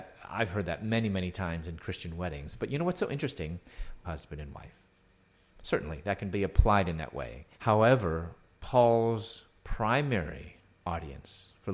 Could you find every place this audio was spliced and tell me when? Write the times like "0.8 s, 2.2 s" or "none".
4.0 s, 7.5 s